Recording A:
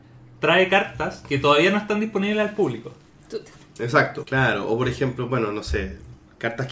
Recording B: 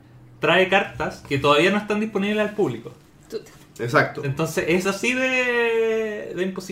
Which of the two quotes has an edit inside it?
A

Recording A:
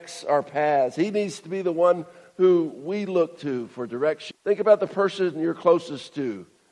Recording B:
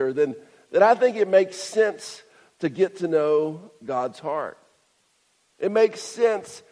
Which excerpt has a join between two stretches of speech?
A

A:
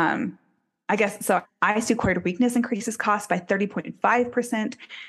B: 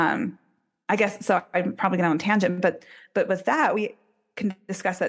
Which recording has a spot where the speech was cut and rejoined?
A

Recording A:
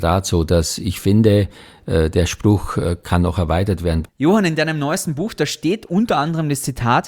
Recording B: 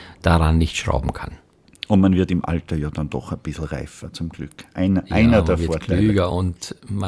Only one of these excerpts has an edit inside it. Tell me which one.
A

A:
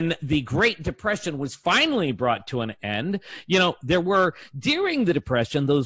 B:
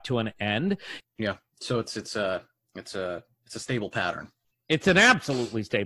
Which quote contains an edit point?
B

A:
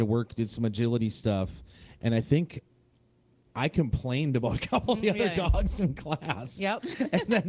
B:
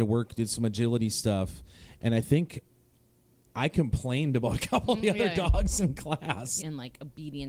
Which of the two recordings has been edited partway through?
B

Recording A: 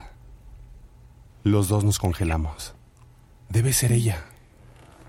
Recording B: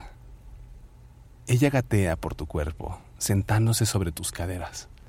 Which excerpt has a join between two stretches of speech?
A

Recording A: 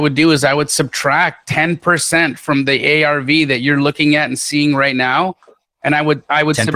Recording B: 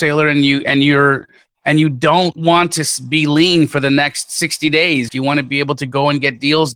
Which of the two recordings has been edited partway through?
B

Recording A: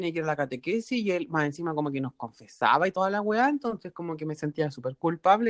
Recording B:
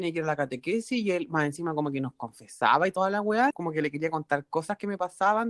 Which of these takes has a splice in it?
B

